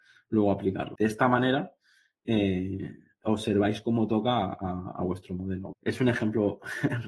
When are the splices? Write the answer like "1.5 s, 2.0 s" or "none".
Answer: 1.0 s, 5.7 s